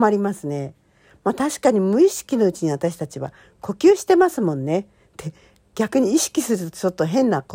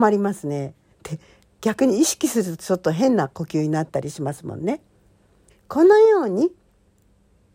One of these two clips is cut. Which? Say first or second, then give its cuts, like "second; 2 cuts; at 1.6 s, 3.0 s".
second; 2 cuts; at 0.9 s, 5.5 s